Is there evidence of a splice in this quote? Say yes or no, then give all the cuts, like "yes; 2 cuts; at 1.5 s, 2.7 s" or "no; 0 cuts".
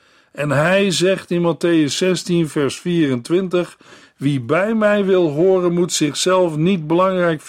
no; 0 cuts